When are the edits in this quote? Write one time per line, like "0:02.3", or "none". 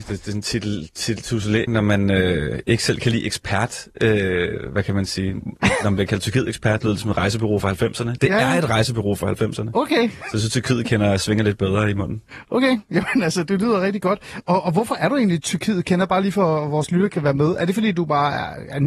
0:01.7